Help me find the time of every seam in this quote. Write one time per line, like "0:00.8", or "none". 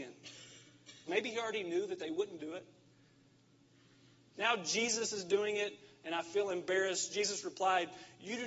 0:01.1
0:04.3